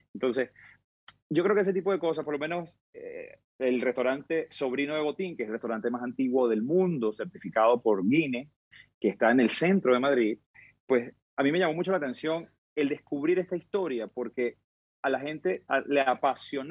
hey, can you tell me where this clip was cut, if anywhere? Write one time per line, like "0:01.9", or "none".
none